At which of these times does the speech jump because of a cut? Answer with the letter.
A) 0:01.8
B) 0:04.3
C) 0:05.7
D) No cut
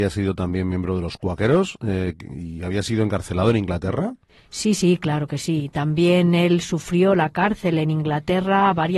D